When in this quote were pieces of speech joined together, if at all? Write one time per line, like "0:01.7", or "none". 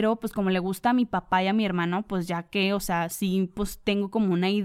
none